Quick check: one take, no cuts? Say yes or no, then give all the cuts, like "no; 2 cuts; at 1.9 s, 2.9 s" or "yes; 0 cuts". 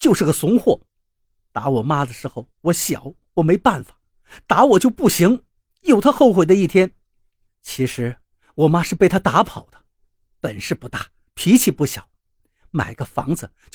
no; 1 cut; at 7.5 s